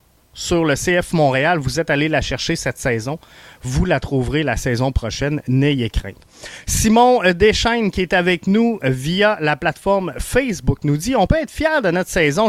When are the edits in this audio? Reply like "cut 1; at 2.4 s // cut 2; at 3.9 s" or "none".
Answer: none